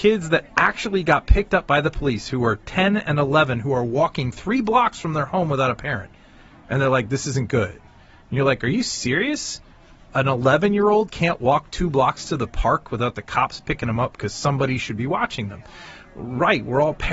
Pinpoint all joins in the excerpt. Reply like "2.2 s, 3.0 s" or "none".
none